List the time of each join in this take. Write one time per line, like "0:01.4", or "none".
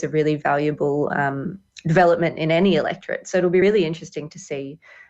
none